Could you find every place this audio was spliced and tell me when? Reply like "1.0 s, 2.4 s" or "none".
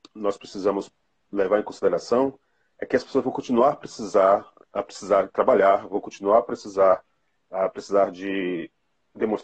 none